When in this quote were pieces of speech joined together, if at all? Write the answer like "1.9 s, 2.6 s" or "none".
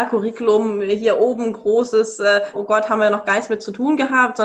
2.5 s